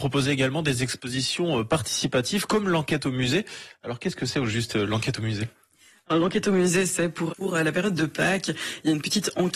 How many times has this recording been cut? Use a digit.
1